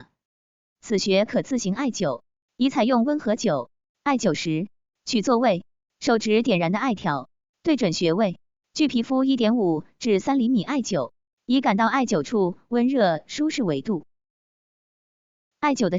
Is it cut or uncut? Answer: uncut